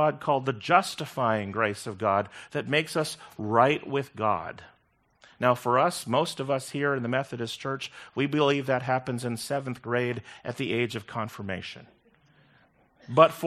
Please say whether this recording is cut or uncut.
uncut